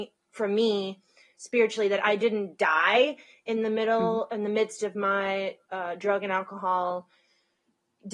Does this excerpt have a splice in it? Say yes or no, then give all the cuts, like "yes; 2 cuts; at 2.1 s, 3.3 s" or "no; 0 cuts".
no; 0 cuts